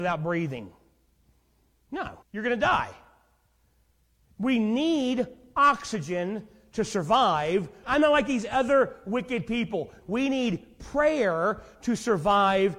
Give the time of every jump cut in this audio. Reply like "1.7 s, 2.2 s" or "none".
2.2 s, 7.8 s, 10.0 s